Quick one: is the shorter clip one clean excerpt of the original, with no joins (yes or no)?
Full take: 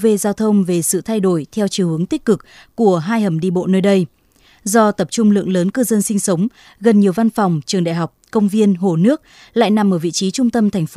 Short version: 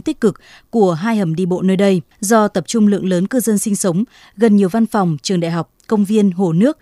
no